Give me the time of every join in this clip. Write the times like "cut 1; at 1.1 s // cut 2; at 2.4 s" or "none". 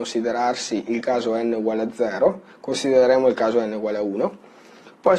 cut 1; at 2.5 s